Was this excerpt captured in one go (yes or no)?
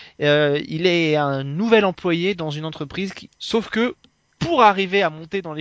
no